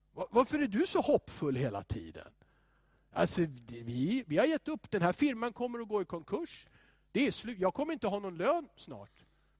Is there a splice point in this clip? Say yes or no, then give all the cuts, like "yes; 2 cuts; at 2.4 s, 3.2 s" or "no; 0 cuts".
no; 0 cuts